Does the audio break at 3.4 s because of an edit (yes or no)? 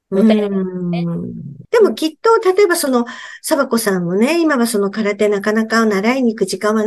no